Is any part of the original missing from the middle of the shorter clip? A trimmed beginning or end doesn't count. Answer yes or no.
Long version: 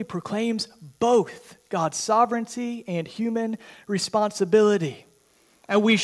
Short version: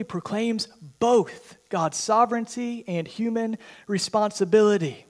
no